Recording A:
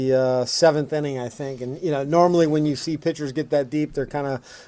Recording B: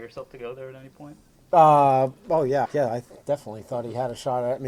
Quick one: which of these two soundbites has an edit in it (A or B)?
B